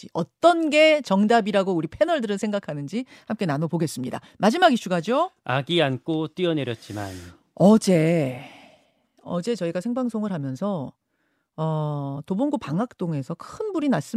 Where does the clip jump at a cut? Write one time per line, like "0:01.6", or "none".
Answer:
none